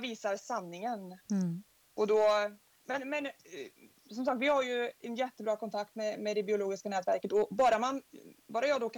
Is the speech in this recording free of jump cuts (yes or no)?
yes